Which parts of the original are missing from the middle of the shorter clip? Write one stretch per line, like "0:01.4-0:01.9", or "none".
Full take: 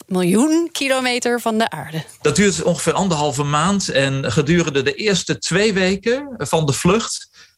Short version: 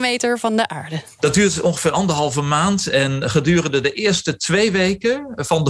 none